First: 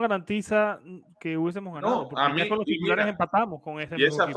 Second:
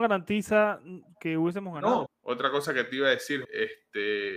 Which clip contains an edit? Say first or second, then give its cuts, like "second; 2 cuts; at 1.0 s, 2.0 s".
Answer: second; 2 cuts; at 2.1 s, 3.4 s